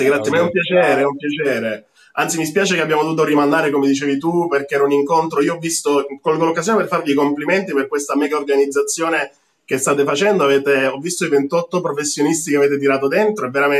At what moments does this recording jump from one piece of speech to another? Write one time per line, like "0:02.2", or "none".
none